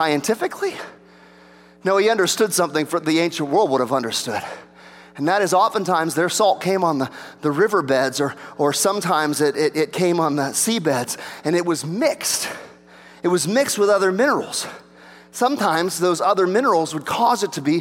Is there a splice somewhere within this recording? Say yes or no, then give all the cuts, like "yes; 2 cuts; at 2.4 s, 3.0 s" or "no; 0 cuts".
no; 0 cuts